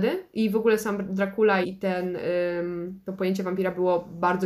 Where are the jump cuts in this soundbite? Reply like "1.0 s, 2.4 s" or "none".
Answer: 1.6 s